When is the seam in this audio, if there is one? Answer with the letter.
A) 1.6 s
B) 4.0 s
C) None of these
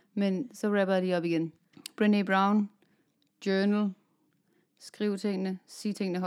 A